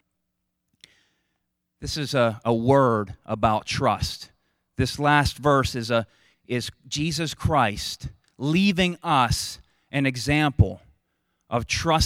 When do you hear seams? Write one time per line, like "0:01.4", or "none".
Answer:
0:06.3

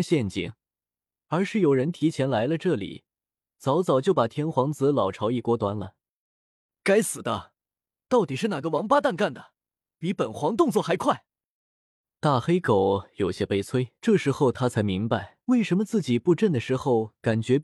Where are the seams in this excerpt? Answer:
0:14.0
0:15.4

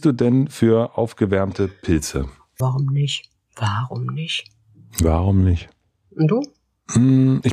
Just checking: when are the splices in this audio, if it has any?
0:02.6

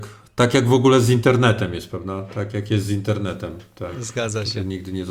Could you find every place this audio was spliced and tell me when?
none

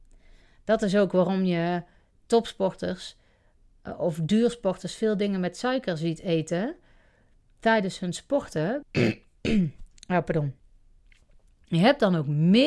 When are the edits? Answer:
0:08.8

